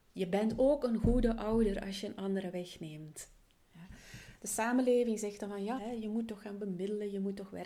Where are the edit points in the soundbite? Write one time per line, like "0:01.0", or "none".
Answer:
0:05.8